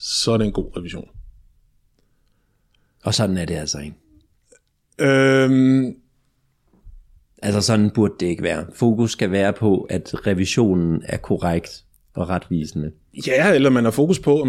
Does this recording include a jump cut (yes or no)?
no